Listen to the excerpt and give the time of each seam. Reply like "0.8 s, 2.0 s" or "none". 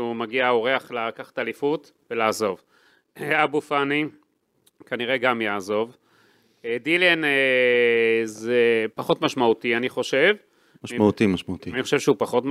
none